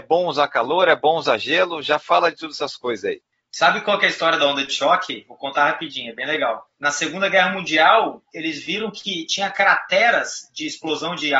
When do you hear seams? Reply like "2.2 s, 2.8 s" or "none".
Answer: none